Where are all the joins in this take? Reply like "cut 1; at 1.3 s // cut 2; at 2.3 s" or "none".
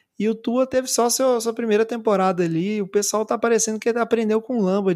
none